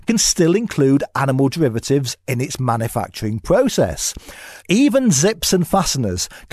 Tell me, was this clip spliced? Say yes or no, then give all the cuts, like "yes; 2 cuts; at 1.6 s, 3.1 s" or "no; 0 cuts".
yes; 1 cut; at 4.6 s